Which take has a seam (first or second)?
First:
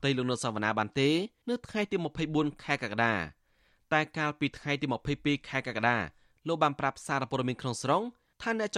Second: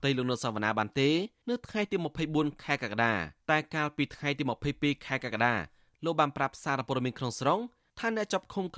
second